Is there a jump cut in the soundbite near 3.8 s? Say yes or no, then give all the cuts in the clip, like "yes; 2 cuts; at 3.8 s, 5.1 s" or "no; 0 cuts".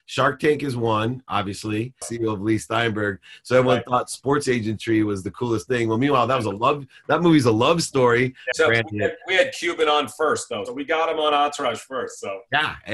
no; 3 cuts; at 2.0 s, 8.5 s, 10.7 s